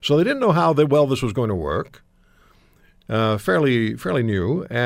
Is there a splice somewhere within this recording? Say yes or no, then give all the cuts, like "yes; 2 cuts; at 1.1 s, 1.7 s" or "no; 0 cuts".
no; 0 cuts